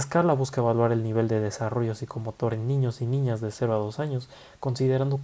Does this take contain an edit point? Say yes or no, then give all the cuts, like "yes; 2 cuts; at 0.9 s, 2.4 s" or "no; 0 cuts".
no; 0 cuts